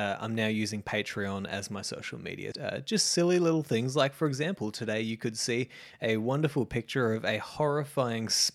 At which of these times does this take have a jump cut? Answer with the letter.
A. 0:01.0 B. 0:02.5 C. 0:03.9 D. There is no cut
B